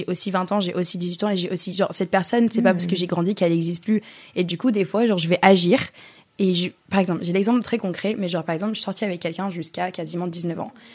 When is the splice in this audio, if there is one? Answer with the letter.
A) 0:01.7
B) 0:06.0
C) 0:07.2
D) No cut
D